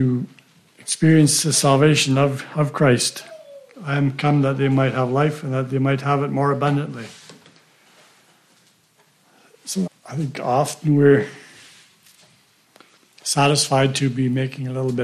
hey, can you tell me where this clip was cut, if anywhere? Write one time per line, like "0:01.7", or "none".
0:03.7
0:09.9

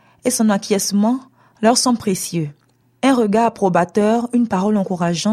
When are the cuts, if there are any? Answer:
none

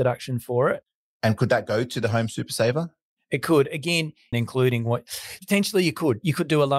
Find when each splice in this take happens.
0:04.3

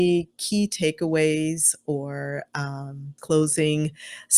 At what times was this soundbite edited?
0:03.2

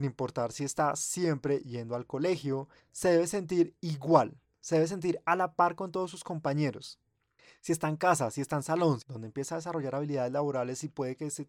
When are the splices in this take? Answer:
0:02.8
0:09.0

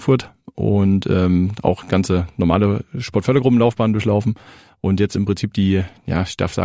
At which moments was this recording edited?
none

